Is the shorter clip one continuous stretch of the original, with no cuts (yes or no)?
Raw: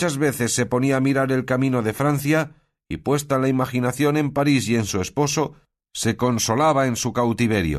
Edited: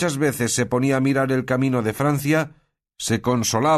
no